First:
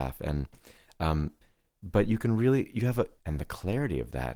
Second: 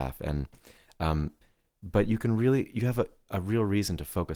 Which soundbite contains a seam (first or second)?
first